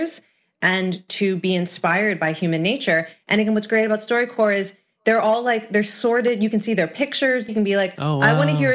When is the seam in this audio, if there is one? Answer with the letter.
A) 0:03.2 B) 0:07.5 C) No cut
B